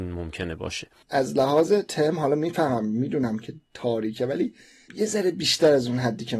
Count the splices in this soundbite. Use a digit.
1